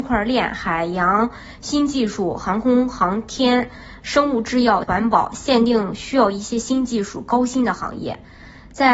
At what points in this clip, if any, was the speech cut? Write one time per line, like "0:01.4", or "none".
0:04.8